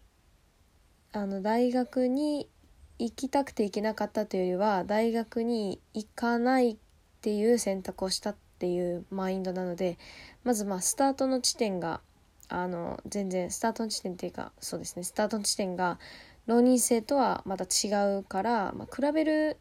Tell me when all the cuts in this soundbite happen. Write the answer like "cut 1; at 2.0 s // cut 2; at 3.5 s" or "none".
cut 1; at 5.8 s